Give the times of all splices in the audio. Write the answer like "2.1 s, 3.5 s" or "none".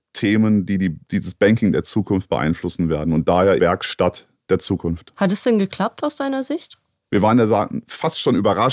3.6 s